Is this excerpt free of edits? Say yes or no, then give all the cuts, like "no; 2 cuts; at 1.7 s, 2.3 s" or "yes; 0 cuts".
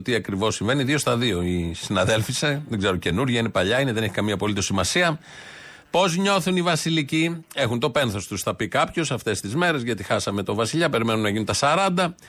yes; 0 cuts